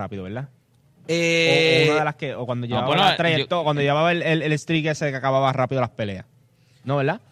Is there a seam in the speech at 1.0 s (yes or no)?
no